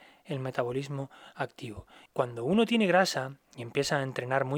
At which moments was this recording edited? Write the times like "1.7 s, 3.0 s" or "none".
2.1 s